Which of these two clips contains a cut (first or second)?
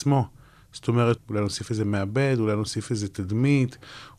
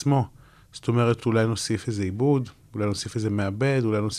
first